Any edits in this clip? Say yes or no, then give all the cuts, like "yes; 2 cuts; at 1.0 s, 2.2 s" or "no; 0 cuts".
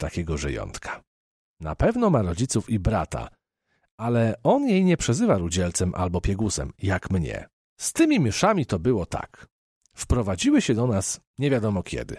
yes; 1 cut; at 7.7 s